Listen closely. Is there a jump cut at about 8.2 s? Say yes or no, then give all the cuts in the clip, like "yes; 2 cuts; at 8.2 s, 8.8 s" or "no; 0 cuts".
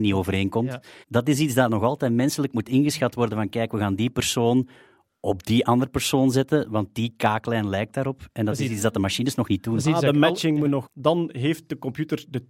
no; 2 cuts; at 1.0 s, 10.8 s